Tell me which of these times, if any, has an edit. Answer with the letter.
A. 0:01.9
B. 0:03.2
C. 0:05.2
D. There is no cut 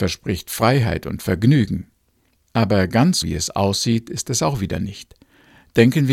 B